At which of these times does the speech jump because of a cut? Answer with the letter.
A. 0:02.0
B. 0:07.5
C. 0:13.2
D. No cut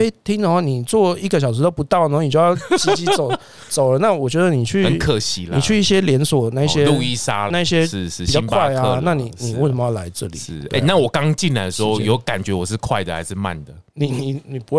B